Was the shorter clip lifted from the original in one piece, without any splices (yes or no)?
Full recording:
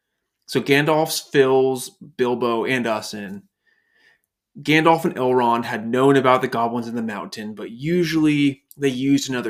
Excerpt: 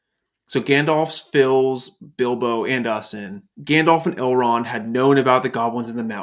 no